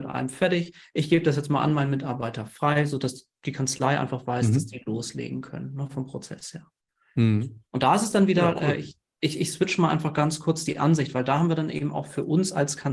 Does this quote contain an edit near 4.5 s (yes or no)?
no